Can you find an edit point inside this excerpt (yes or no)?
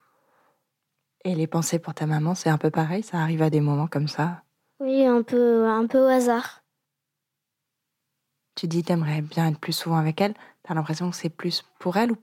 no